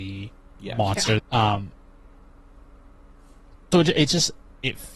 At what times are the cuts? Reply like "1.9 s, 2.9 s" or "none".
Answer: 1.2 s, 3.7 s